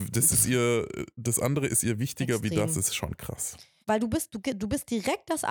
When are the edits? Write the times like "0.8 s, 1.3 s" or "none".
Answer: 3.8 s